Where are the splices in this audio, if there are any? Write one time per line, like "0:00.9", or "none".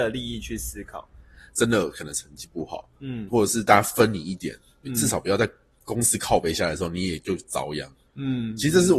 0:01.5
0:03.3